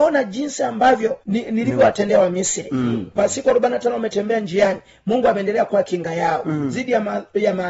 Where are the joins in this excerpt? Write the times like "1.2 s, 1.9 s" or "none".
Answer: 1.2 s, 3.2 s